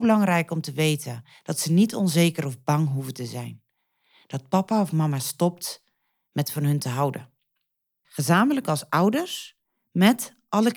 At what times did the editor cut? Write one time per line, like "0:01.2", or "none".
0:08.0